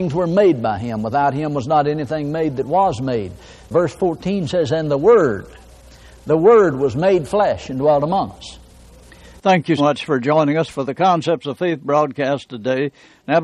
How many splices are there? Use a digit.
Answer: 1